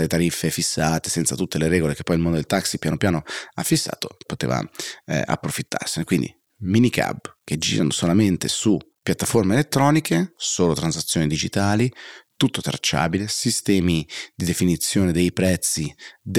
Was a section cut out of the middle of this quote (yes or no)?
yes